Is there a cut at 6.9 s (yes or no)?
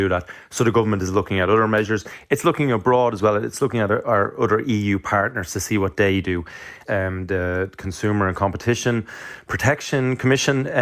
yes